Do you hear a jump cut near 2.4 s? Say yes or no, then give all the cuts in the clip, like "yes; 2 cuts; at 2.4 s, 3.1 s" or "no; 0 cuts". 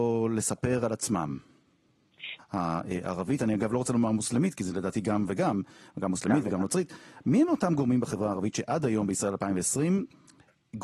yes; 1 cut; at 2.4 s